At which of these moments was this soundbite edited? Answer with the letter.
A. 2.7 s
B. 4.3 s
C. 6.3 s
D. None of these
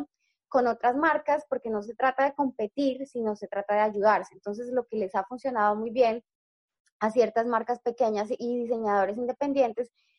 D